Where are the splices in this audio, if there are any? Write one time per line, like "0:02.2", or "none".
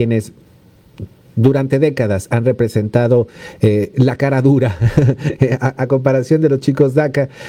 none

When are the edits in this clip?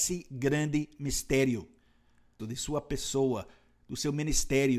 0:02.4

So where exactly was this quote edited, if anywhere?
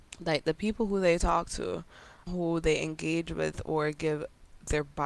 0:02.3

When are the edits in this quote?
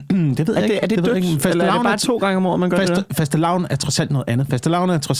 none

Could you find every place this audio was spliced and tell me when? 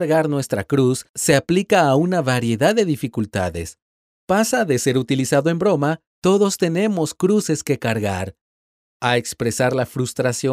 0:06.1

